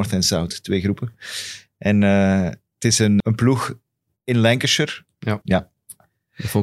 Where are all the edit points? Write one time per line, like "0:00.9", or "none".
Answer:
0:03.2
0:05.4

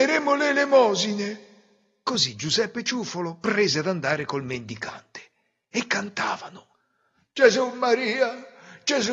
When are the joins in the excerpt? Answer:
none

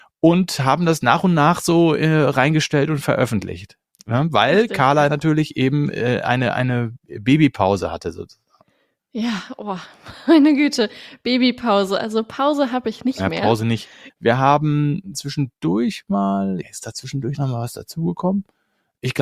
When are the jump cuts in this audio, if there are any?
0:14.1
0:16.6

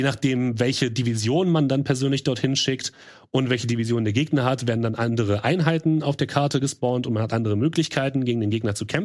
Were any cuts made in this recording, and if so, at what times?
none

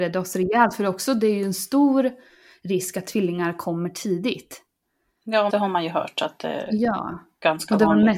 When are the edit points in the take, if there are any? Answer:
0:05.5

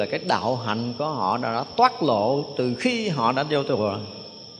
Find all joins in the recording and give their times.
none

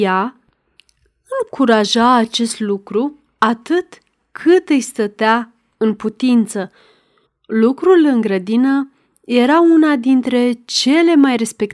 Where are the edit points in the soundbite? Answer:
0:07.3

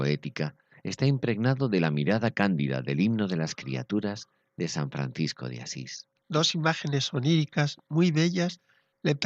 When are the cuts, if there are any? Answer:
0:06.2

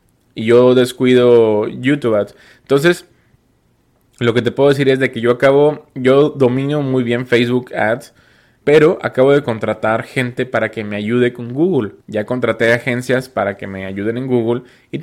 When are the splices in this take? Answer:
0:08.6
0:12.0

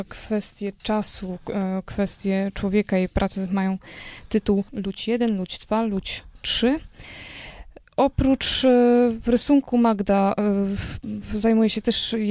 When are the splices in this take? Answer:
0:04.7

